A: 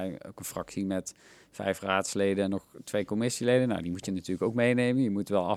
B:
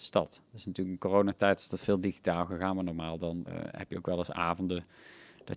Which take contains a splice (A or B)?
B